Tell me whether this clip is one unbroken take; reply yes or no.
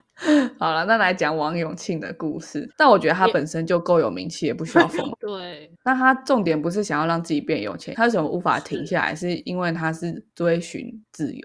no